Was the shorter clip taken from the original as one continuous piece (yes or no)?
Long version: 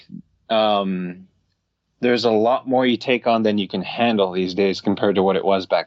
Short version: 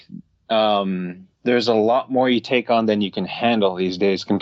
no